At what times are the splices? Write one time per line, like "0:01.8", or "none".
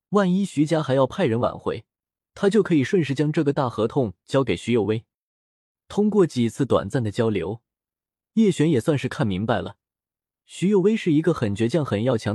none